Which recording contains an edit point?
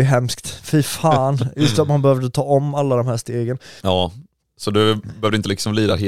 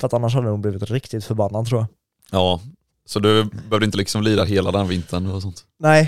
first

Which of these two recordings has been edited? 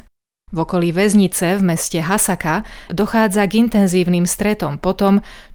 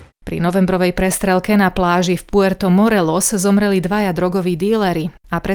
first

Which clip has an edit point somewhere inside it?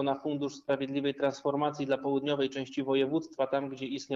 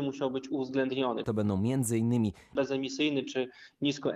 second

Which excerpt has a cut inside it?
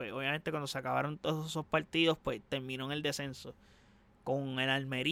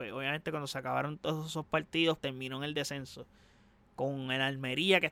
second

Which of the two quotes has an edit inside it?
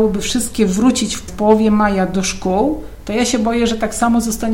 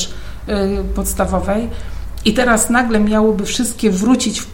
first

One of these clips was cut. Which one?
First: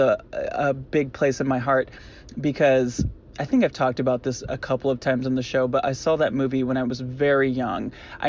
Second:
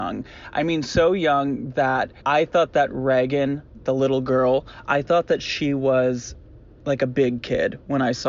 second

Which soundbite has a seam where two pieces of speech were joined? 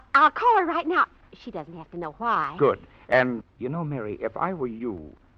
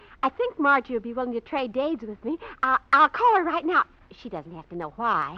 first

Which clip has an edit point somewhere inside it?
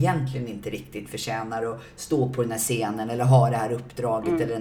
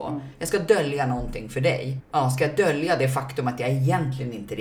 second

